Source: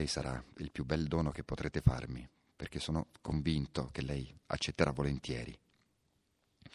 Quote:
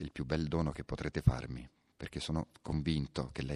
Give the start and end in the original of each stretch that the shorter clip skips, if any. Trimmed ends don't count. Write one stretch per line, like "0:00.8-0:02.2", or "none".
none